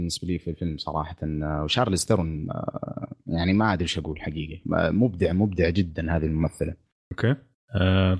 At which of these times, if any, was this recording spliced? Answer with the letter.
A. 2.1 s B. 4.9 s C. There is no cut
C